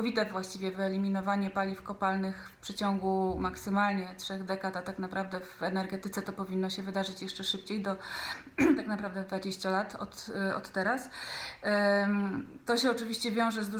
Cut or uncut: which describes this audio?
uncut